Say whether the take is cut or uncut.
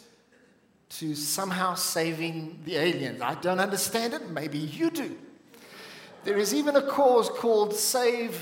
uncut